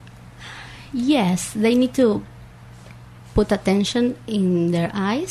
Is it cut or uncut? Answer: uncut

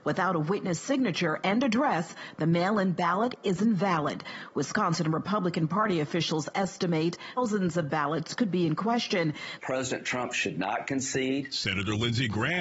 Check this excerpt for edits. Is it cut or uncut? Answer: cut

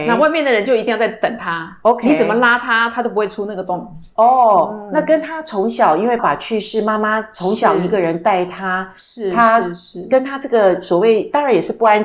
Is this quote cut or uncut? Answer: cut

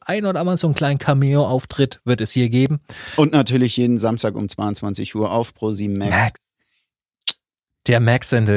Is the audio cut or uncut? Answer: uncut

